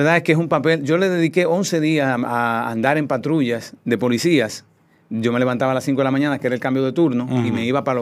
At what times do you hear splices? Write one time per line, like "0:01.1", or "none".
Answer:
none

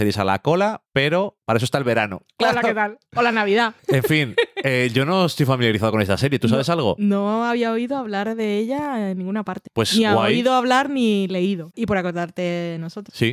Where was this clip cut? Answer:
0:11.7

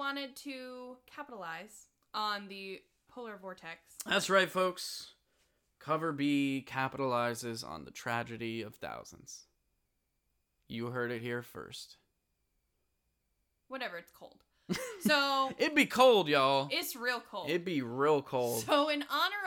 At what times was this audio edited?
0:03.1

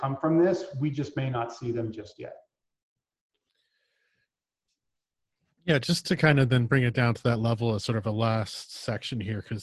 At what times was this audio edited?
none

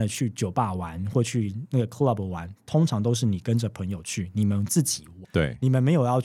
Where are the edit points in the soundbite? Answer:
none

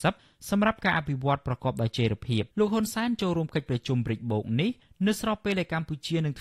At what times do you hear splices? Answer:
0:02.5

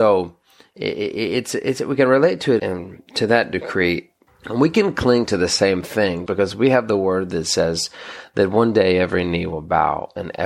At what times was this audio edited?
0:02.6
0:04.3
0:06.3

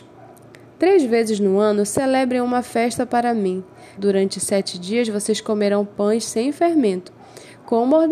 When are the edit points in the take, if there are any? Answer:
0:04.0

